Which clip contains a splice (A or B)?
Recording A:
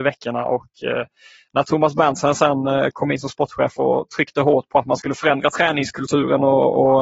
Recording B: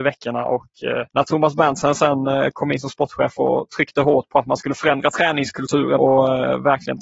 B